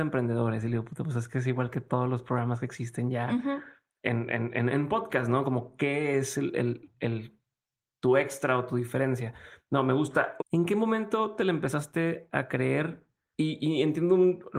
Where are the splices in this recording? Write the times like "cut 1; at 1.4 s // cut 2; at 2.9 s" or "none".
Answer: cut 1; at 10.4 s